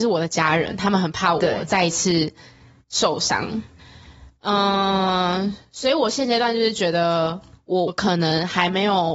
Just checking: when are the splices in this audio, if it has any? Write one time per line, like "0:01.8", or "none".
0:07.9